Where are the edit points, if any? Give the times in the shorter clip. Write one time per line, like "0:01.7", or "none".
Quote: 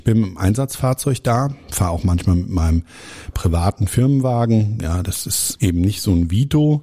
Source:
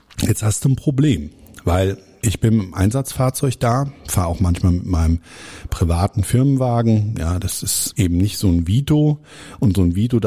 none